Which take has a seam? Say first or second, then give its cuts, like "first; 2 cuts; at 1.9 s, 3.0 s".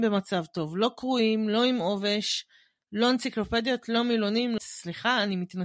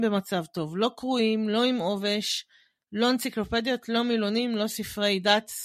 first; 1 cut; at 4.6 s